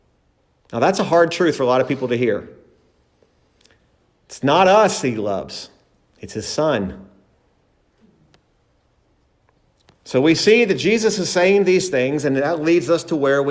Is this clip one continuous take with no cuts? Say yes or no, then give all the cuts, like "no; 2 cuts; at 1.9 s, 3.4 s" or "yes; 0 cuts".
yes; 0 cuts